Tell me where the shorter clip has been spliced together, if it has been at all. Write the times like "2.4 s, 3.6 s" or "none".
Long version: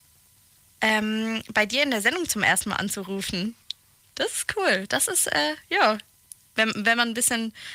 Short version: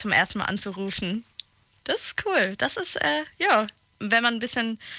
4.0 s

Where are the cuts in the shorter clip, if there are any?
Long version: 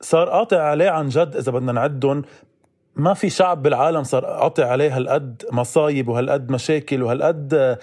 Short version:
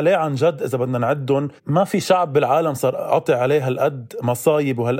1.6 s

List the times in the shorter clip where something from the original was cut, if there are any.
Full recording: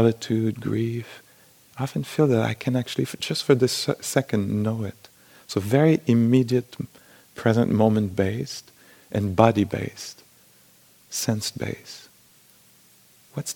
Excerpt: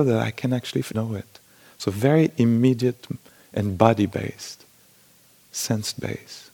0.9 s, 3.4 s

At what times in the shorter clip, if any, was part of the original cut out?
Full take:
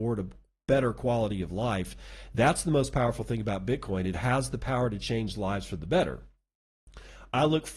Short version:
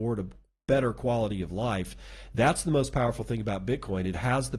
none

